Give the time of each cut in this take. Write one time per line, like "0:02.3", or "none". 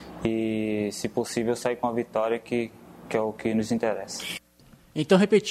none